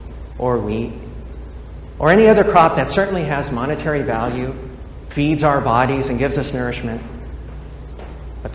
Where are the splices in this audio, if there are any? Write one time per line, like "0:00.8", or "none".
none

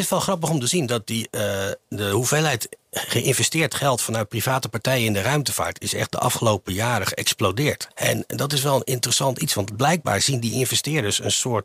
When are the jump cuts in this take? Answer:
0:07.9

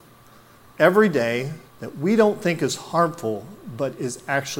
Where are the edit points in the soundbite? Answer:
0:01.7

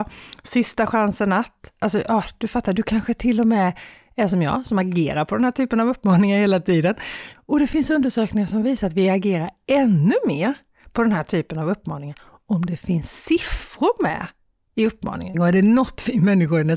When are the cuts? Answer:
0:07.3
0:15.3

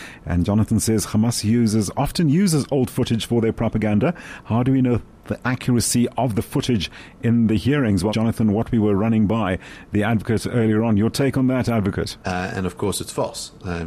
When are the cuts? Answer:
0:08.1
0:12.2

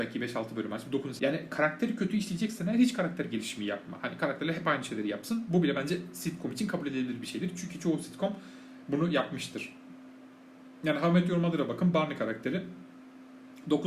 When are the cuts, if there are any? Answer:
0:01.2

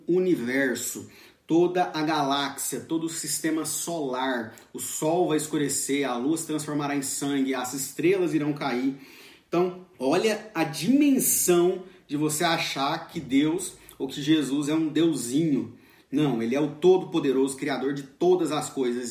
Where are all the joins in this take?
0:09.9

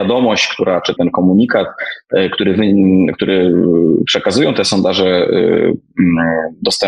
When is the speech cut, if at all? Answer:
0:01.0

